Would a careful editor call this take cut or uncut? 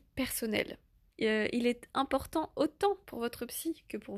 cut